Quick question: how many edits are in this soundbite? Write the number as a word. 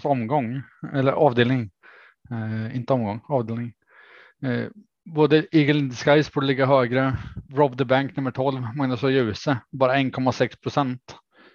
one